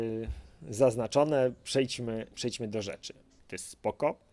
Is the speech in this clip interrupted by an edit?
yes; 1 cut; at 3.4 s

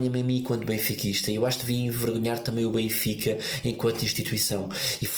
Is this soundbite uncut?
yes; 0 cuts

